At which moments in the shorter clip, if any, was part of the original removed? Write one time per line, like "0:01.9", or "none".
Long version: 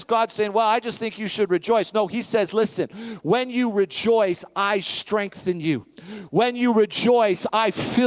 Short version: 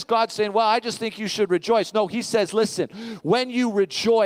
none